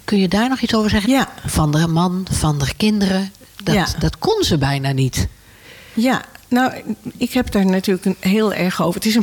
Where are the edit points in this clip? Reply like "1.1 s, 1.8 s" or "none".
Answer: 1.0 s